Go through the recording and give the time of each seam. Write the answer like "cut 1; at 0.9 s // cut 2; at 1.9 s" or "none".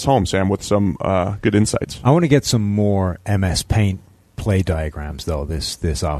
none